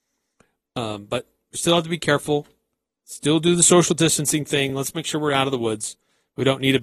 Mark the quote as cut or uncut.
uncut